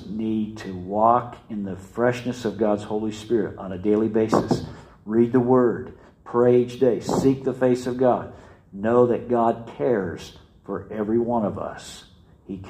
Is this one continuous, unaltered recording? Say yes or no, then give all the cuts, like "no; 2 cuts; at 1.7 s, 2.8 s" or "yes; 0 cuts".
yes; 0 cuts